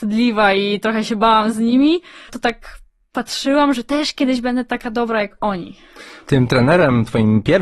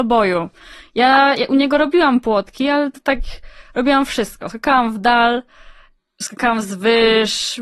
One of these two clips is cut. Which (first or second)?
first